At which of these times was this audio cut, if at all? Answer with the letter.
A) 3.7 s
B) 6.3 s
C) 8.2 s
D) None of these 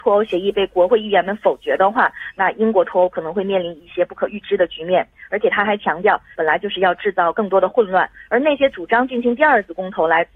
B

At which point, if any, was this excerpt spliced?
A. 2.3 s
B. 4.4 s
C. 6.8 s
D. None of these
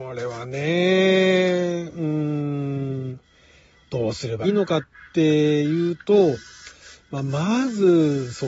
B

